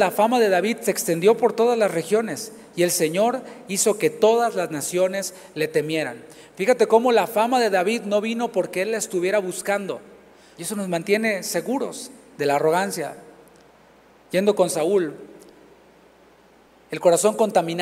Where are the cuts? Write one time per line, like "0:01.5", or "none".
0:10.5